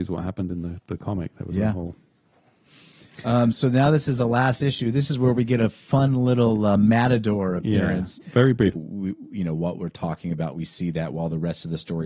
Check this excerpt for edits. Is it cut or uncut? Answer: cut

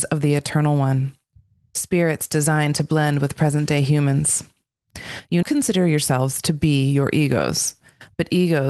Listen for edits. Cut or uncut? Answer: cut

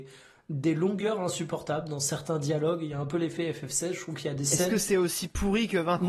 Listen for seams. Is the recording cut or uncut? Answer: uncut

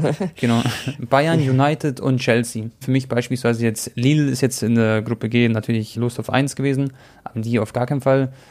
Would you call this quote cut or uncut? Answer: cut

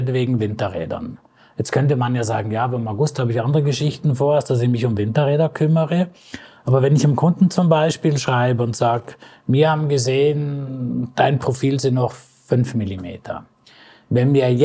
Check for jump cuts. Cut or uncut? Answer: uncut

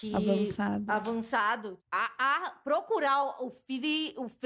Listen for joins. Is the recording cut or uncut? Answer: cut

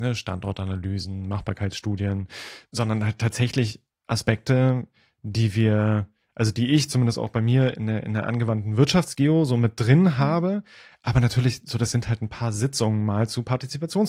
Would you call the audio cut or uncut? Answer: uncut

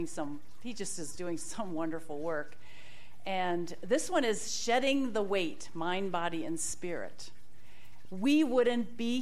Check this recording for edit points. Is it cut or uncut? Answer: cut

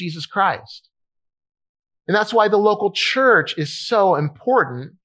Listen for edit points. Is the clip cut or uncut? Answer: uncut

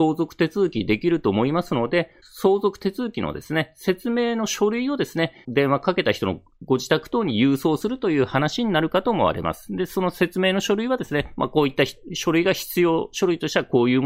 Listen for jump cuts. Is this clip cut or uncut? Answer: uncut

